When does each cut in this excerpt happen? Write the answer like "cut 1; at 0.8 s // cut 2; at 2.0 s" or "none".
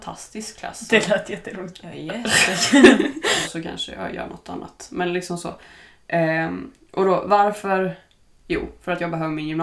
cut 1; at 3.4 s // cut 2; at 8.4 s